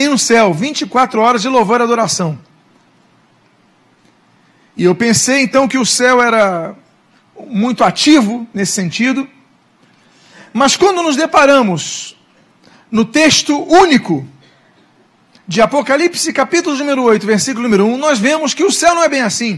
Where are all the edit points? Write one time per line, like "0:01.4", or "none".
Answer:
none